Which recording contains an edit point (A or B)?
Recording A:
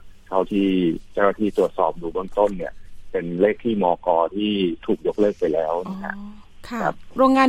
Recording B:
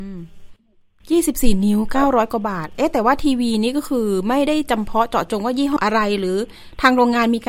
B